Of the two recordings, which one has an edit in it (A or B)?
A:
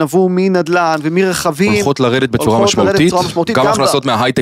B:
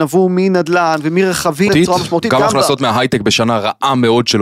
B